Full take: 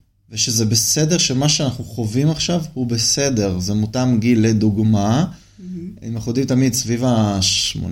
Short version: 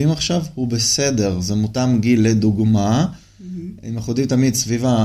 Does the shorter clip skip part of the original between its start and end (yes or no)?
no